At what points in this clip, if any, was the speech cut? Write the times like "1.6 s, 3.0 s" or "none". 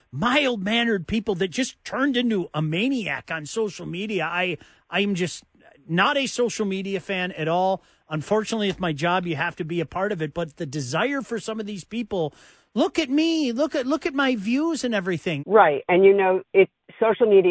15.4 s